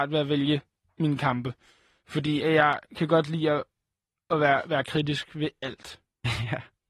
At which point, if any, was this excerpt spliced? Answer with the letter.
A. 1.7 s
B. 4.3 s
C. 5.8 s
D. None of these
D